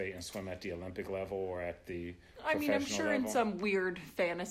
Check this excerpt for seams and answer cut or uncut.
uncut